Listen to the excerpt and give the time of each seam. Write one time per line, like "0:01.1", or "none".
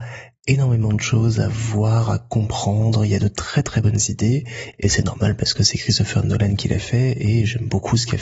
none